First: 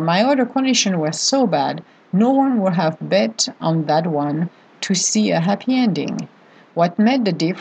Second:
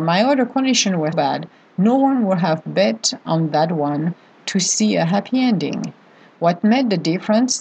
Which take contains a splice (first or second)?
second